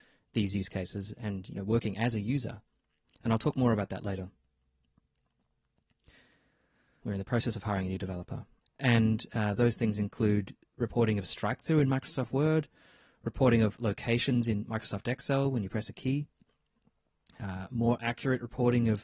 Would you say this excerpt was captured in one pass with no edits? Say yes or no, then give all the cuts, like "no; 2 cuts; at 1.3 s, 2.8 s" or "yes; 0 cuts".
no; 2 cuts; at 7.0 s, 8.6 s